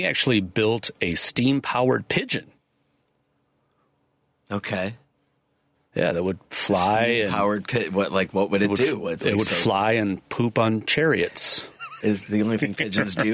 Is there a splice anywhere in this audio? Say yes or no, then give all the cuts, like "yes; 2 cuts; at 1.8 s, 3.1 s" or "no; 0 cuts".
yes; 1 cut; at 12.0 s